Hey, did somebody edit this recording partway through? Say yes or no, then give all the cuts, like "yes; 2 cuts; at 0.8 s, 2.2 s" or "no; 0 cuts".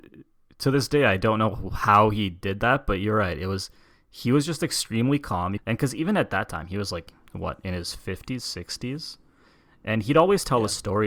yes; 1 cut; at 5.6 s